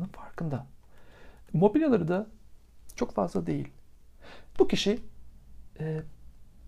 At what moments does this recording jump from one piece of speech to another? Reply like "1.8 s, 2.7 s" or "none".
1.5 s, 4.5 s